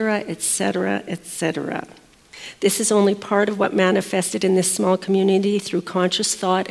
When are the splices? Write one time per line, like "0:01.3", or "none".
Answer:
none